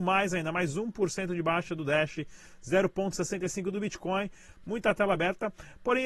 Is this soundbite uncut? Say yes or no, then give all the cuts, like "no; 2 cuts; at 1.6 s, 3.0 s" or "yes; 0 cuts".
no; 1 cut; at 4.6 s